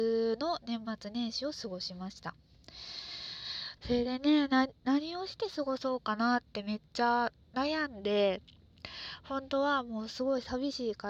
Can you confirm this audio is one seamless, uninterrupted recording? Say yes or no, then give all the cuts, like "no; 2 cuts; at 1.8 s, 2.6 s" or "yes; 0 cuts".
no; 2 cuts; at 3.8 s, 7.4 s